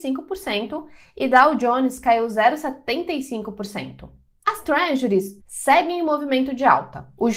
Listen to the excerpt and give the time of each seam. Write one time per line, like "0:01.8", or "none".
0:05.4